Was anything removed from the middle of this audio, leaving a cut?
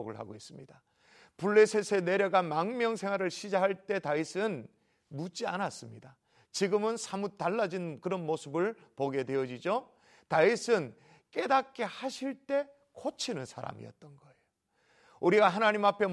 no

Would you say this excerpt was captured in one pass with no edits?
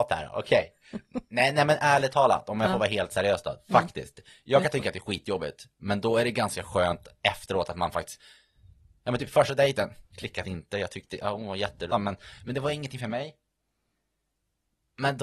no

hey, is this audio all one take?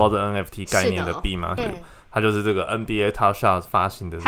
no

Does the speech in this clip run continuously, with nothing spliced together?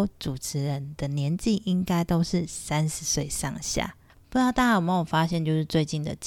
no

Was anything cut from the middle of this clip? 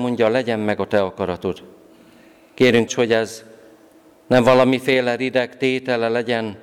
yes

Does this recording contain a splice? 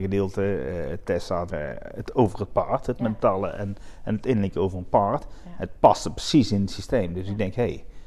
yes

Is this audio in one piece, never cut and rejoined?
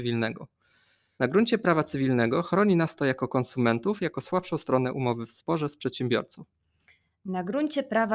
no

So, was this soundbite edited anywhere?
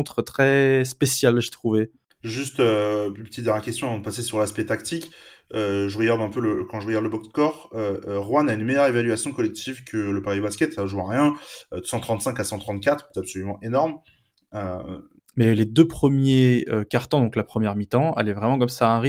yes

